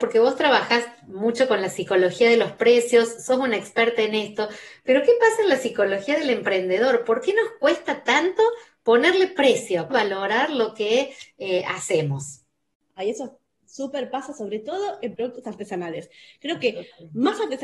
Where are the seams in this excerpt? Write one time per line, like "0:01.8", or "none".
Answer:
0:09.9

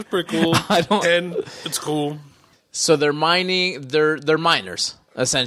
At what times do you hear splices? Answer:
0:01.0

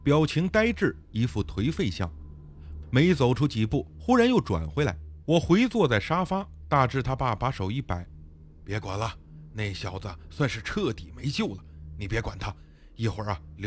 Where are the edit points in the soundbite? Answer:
0:02.8
0:05.2

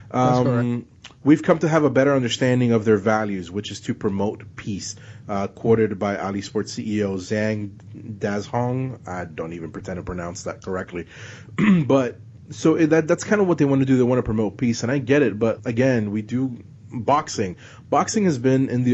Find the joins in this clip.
0:15.6

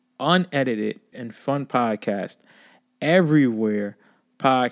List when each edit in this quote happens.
0:01.1

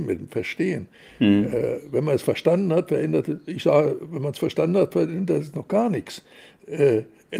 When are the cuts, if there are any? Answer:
none

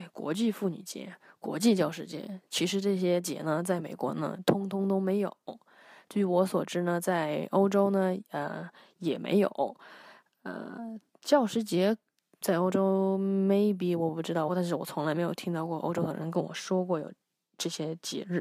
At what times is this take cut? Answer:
0:12.4
0:14.5

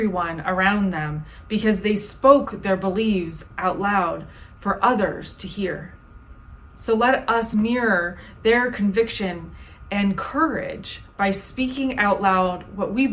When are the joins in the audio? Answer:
none

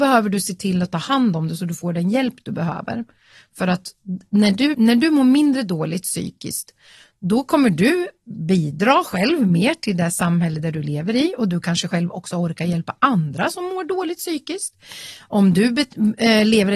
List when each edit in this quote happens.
0:04.7

